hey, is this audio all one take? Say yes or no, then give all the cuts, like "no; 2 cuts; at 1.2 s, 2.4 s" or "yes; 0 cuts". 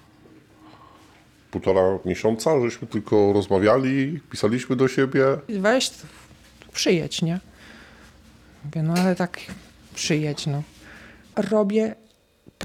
no; 1 cut; at 11.2 s